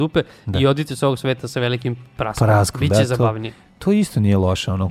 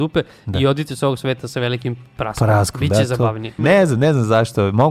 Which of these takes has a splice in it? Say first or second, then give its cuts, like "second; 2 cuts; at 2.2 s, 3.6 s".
second; 1 cut; at 3.6 s